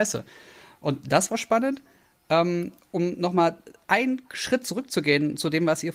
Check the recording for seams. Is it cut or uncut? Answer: uncut